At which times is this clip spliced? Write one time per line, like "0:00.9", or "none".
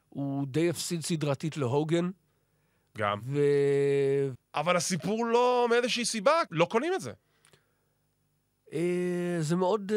0:04.3
0:06.5

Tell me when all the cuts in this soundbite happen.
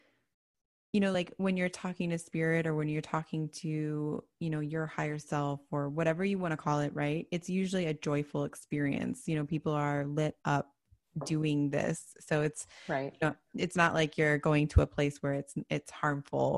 none

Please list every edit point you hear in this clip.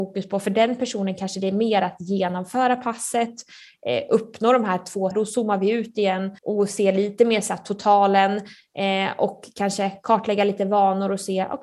0:05.1
0:06.4

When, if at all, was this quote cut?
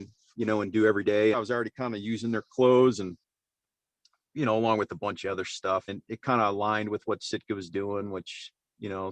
0:01.3
0:05.9

